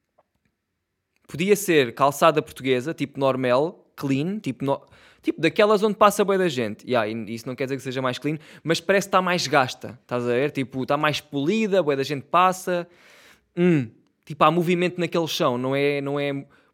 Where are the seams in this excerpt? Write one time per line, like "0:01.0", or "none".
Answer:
none